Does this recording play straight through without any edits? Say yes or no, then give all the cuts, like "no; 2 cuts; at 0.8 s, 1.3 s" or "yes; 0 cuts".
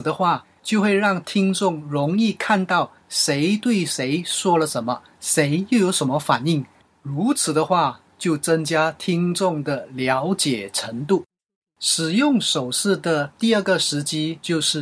yes; 0 cuts